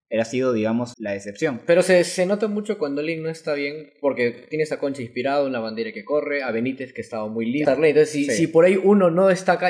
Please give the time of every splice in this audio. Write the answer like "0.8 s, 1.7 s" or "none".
0.9 s, 7.6 s